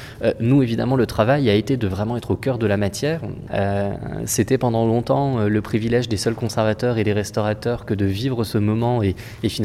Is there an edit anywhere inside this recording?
yes; 1 cut; at 3.5 s

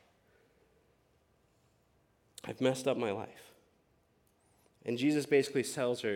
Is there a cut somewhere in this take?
no; 0 cuts

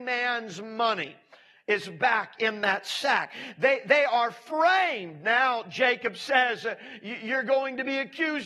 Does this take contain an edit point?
no; 0 cuts

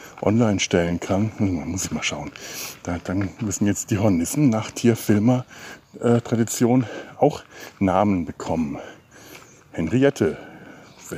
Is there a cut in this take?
no; 0 cuts

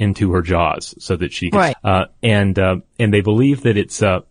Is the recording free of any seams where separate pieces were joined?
no; 1 cut; at 1.7 s

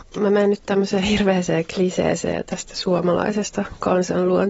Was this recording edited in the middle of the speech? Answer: no; 0 cuts

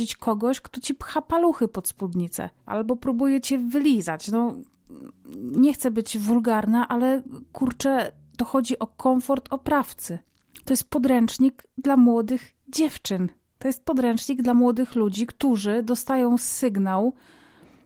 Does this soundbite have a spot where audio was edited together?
yes; 1 cut; at 2.7 s

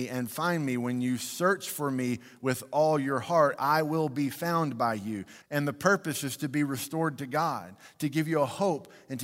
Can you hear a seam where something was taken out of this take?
yes; 1 cut; at 5.4 s

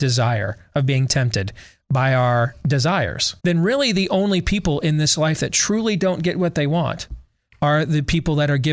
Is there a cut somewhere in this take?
yes; 1 cut; at 3.4 s

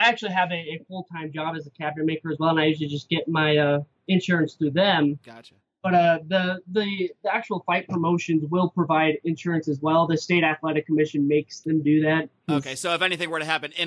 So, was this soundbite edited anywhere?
no; 0 cuts

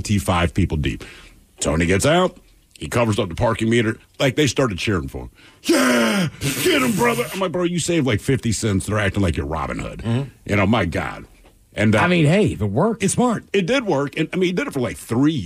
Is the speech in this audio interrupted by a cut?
no; 0 cuts

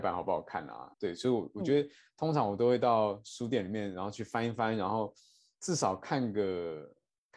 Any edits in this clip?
yes; 1 cut; at 0.9 s

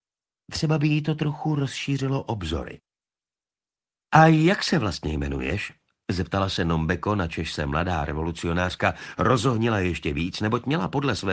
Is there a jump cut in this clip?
no; 0 cuts

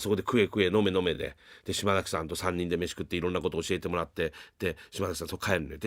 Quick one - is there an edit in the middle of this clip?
no; 0 cuts

